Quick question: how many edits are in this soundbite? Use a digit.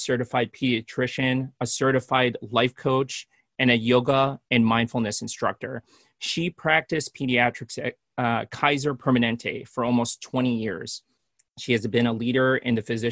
0